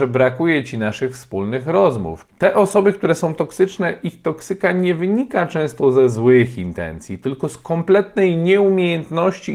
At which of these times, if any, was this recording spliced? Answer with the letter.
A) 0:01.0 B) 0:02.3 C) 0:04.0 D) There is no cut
B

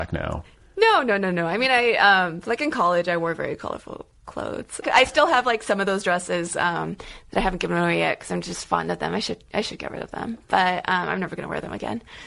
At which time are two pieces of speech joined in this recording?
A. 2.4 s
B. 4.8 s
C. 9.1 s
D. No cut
B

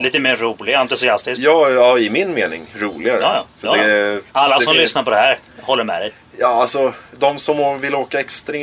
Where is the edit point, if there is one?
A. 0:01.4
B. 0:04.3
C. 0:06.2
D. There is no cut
B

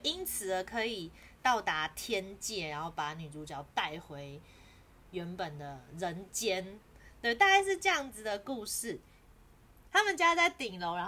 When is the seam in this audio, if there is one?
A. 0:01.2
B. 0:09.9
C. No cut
B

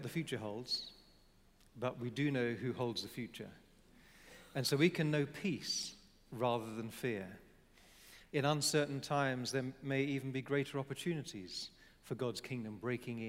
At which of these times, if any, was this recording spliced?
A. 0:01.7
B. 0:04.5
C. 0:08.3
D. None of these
C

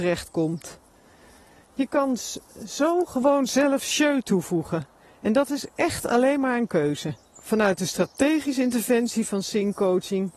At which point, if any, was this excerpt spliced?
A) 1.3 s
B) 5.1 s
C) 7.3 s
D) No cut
C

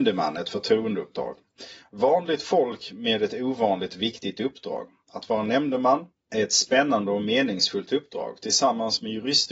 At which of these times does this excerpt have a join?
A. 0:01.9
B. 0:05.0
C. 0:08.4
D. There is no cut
D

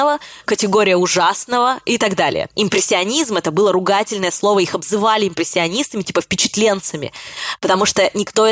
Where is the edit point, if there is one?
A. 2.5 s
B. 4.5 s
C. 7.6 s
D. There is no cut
A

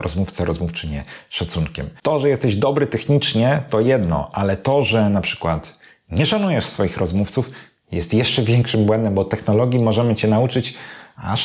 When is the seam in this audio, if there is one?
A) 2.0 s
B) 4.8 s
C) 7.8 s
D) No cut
A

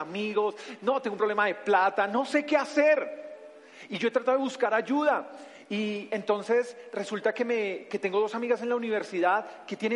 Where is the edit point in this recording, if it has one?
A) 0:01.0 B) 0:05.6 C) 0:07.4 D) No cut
D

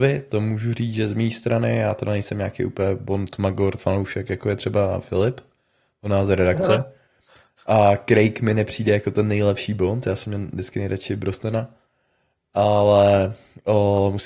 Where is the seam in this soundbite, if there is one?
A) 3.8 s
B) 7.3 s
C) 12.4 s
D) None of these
A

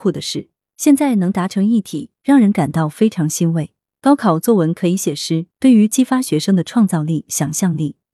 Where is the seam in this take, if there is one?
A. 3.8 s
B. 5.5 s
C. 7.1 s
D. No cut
B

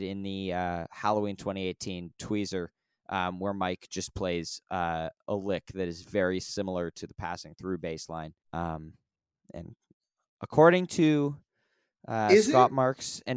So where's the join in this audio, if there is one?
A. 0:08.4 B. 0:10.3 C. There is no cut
A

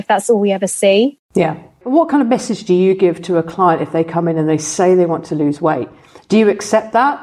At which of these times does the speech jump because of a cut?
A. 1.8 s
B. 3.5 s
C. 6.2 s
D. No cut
A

